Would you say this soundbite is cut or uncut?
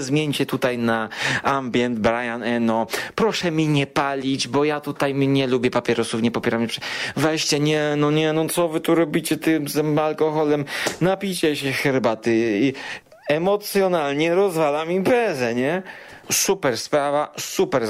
cut